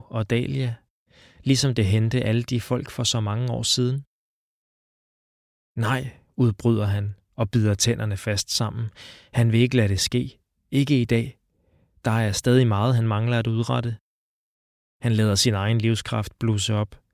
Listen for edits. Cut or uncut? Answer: uncut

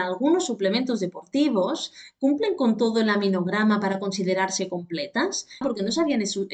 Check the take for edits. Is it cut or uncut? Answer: cut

